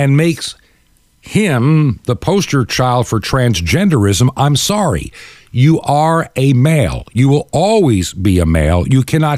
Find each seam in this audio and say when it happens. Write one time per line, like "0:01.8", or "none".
none